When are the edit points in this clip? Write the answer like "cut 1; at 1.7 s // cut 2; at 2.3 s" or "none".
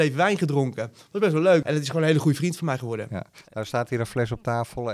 cut 1; at 1.6 s